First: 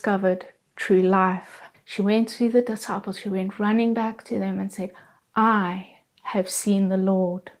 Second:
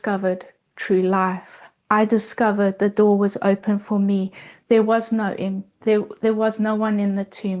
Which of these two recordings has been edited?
first; 1 cut; at 1.7 s

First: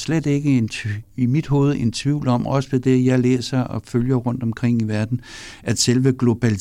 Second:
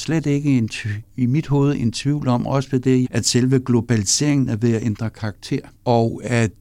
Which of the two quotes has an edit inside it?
second; 1 cut; at 3.0 s

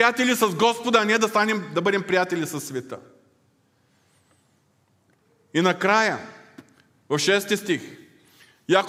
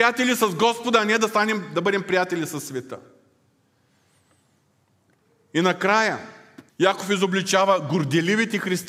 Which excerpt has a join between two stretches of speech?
second; 1 cut; at 6.7 s

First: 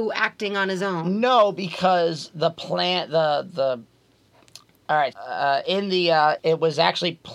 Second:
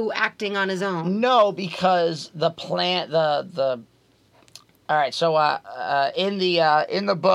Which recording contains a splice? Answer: first; 2 cuts; at 5.1 s, 6.4 s

